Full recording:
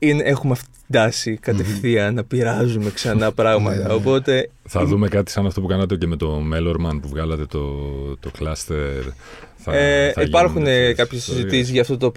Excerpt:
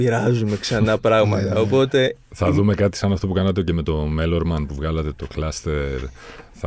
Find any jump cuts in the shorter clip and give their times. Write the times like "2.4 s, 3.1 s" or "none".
5.1 s